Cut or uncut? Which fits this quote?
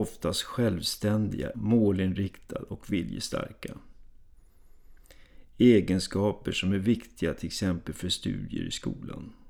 cut